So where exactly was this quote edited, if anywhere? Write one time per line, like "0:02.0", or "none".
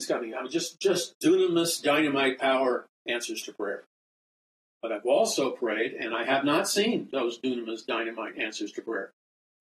0:01.2